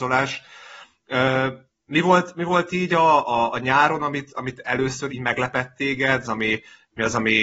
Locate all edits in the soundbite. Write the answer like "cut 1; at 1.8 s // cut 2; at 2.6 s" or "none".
cut 1; at 5.1 s // cut 2; at 6.2 s